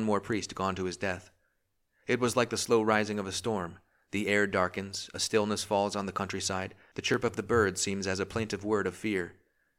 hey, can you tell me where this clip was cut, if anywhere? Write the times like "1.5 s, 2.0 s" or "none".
none